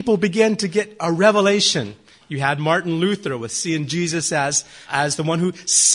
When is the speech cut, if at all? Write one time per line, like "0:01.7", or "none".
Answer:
0:04.9